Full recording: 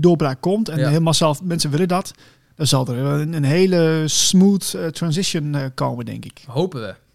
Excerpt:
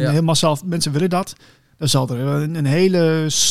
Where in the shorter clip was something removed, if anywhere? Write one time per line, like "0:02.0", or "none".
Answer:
none

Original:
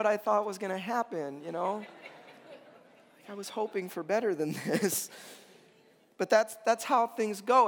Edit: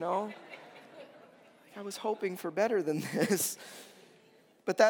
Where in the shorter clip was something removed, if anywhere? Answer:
none

